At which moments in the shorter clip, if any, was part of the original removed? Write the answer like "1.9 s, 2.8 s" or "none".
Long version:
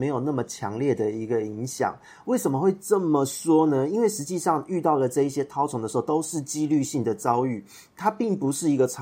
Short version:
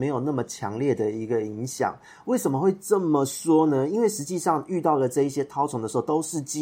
none